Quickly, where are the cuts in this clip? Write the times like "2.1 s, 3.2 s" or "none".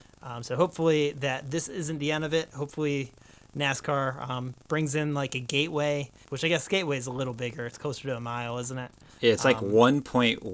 6.2 s